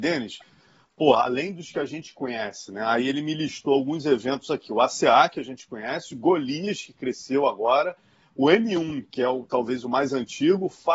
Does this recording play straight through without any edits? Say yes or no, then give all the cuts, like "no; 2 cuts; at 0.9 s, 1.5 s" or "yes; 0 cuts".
yes; 0 cuts